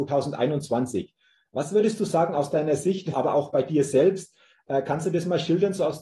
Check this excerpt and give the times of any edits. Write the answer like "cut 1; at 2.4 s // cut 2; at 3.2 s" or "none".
cut 1; at 3.1 s